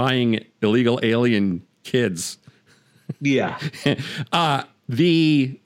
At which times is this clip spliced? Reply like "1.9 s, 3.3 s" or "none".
none